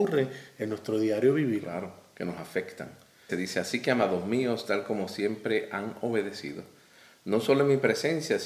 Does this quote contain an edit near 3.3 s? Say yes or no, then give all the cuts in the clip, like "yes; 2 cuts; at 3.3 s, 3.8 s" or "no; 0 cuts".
yes; 1 cut; at 3.3 s